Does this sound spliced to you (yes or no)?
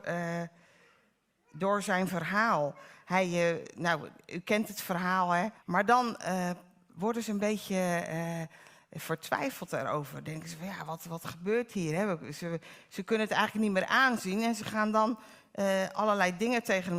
yes